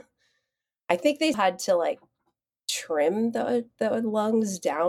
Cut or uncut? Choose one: cut